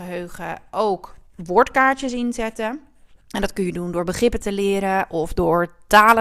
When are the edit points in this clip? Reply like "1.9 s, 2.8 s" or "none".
3.2 s